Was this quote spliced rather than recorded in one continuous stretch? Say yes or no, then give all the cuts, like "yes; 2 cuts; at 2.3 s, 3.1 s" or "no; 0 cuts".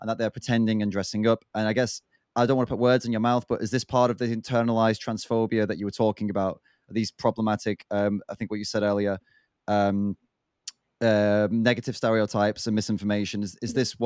no; 0 cuts